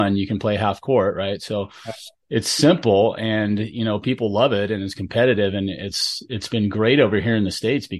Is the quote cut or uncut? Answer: uncut